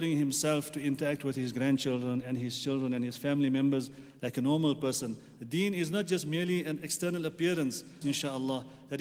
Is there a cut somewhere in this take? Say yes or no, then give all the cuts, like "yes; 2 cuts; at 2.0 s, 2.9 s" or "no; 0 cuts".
yes; 2 cuts; at 5.4 s, 8.0 s